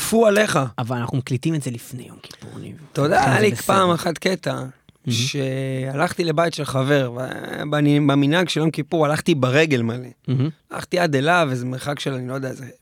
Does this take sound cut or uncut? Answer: uncut